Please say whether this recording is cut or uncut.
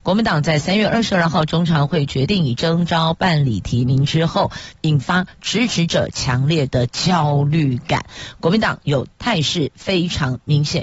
cut